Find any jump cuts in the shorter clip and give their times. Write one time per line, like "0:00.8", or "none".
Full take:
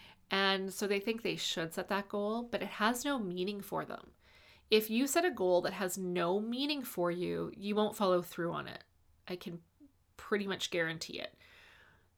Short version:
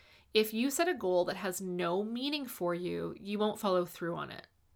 none